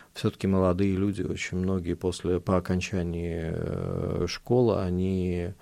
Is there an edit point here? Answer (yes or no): no